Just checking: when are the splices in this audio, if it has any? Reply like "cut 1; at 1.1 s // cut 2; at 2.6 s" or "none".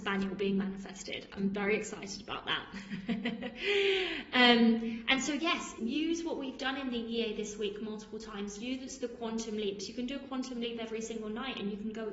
cut 1; at 5.8 s